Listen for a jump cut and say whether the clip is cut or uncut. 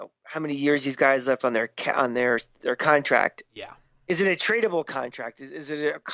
uncut